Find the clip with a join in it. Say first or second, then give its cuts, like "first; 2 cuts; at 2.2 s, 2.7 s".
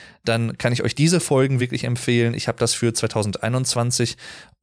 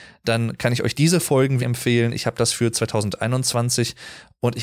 second; 1 cut; at 1.6 s